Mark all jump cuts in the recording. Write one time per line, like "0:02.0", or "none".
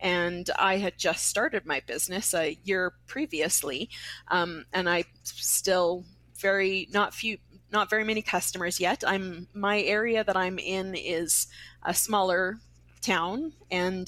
none